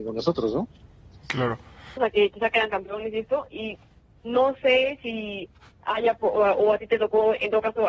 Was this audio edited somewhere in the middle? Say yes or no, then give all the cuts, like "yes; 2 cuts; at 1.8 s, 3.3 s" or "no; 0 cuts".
yes; 1 cut; at 2.0 s